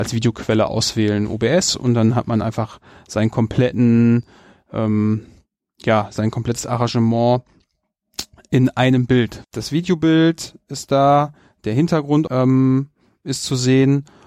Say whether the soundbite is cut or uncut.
cut